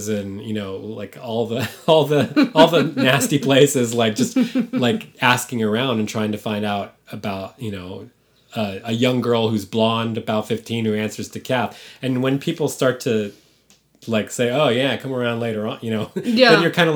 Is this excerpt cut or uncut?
uncut